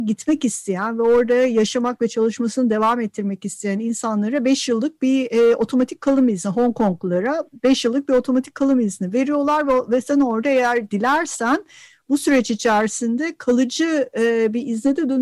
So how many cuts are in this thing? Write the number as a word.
zero